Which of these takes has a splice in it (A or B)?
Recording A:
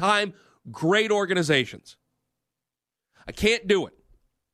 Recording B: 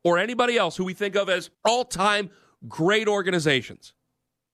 B